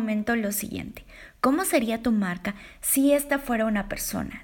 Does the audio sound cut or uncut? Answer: uncut